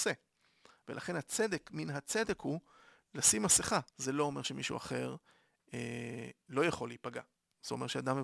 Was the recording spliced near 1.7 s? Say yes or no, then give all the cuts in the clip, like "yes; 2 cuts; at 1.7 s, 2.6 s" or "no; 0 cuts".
no; 1 cut; at 3.9 s